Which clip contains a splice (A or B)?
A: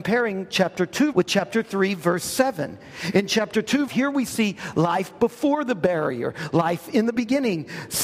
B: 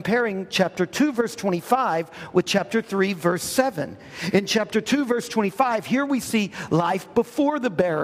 A